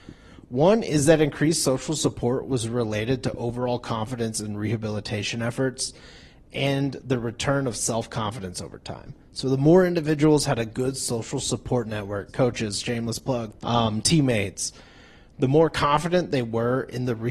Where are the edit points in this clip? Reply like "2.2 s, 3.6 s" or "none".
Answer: 12.3 s, 13.6 s